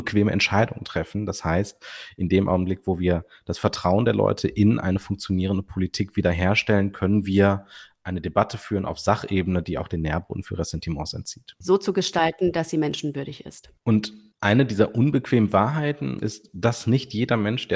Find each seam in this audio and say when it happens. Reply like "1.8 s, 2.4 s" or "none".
11.6 s, 13.8 s, 16.2 s